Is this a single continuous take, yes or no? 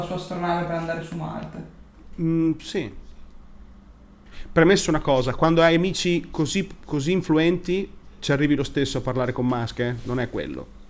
yes